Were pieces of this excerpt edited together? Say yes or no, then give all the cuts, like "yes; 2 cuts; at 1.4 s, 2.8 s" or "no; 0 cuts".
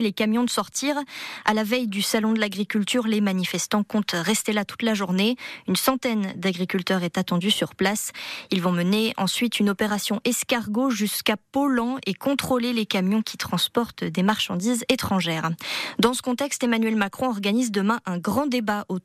no; 0 cuts